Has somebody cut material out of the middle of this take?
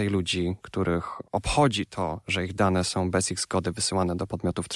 yes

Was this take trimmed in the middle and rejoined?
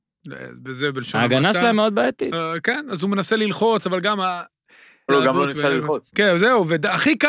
yes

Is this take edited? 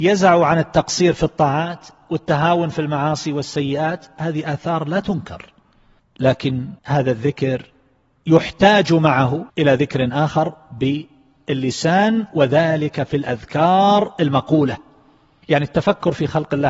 yes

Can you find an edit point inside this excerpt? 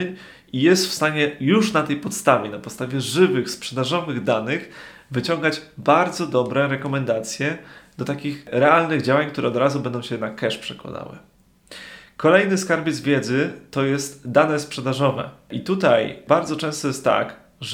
no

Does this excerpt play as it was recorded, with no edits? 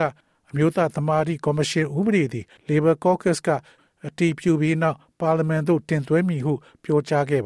no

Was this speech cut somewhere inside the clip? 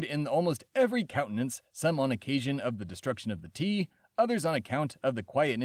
no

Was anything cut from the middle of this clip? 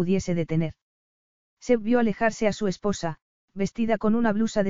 no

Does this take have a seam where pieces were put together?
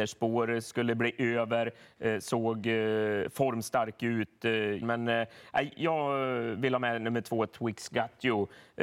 yes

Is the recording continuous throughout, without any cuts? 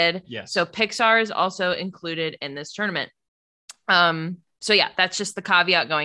yes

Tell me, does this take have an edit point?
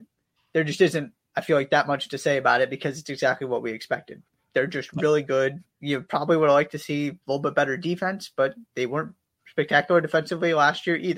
yes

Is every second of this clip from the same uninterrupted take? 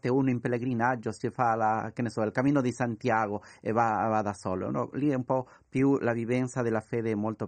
yes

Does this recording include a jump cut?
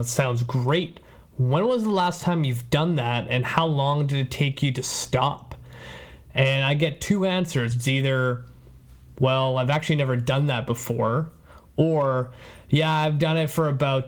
no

